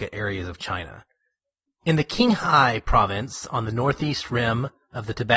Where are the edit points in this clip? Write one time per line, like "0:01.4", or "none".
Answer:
0:01.7